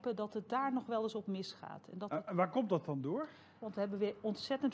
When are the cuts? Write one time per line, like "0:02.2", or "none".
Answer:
0:03.6